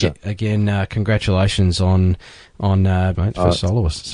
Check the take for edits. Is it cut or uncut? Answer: cut